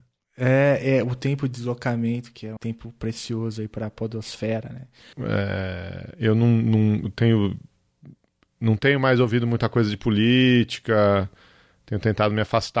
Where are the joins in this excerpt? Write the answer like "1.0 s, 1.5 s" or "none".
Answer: 2.6 s, 5.1 s